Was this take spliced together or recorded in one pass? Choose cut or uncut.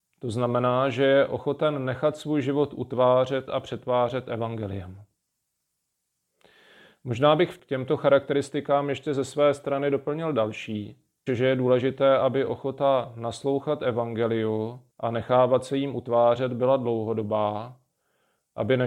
cut